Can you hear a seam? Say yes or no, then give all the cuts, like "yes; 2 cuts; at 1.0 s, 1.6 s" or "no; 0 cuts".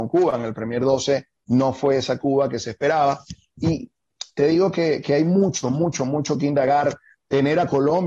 no; 0 cuts